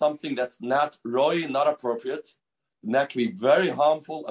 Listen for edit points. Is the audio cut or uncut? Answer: uncut